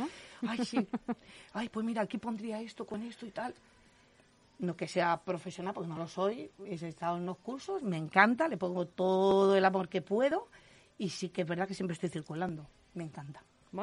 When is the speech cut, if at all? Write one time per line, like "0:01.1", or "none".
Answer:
none